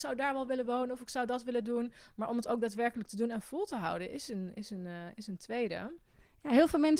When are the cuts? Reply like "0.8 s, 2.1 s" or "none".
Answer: none